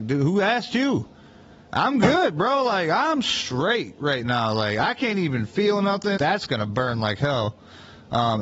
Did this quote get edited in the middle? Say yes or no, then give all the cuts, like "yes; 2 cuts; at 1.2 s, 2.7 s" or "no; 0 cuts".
yes; 1 cut; at 6.2 s